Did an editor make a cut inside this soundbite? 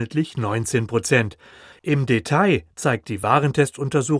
yes; 1 cut; at 1.7 s

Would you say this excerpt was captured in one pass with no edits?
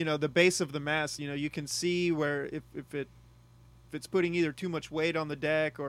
yes; 0 cuts

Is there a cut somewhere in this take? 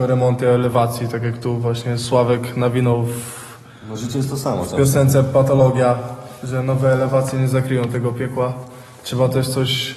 no; 0 cuts

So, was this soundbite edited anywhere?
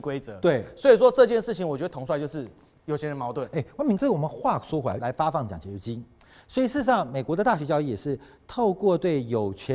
yes; 2 cuts; at 4.0 s, 5.0 s

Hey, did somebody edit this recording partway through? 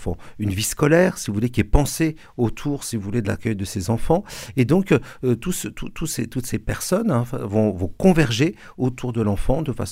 no; 0 cuts

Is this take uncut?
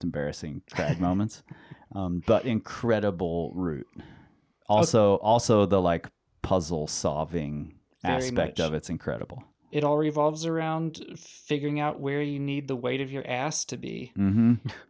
yes; 0 cuts

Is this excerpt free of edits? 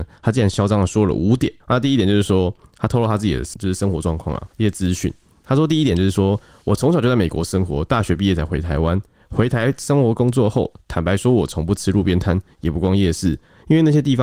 yes; 0 cuts

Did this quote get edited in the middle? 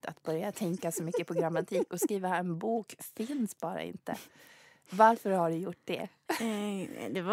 no; 0 cuts

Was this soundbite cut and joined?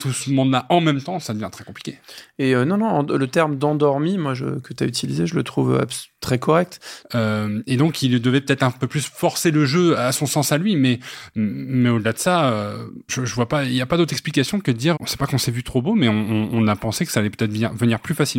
yes; 3 cuts; at 7.0 s, 13.1 s, 14.9 s

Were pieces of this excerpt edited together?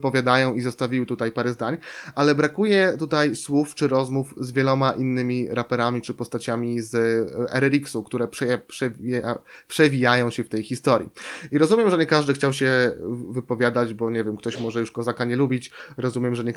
no; 0 cuts

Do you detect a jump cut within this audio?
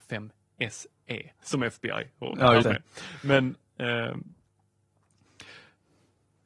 yes; 2 cuts; at 1.4 s, 2.6 s

